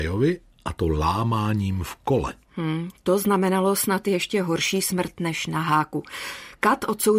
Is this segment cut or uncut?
uncut